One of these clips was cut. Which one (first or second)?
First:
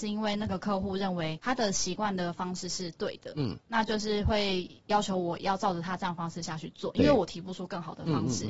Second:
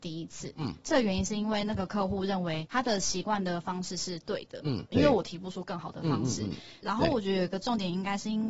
second